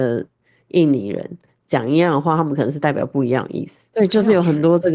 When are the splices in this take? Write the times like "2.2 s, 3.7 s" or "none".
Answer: 3.9 s